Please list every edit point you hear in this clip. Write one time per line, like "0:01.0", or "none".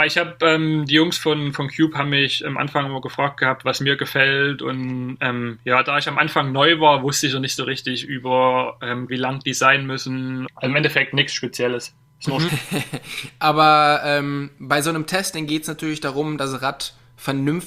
0:09.1
0:10.5
0:12.5